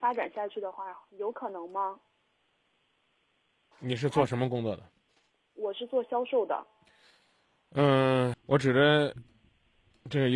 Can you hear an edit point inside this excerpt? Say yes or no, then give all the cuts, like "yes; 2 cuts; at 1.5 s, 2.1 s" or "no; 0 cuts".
yes; 2 cuts; at 3.7 s, 8.3 s